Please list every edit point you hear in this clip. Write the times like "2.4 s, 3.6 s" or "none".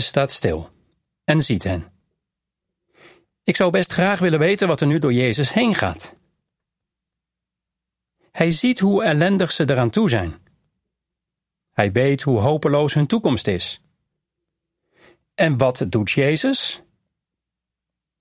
none